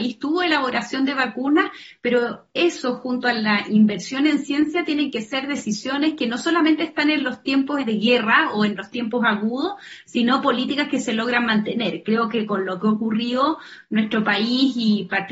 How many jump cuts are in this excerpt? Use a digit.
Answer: 1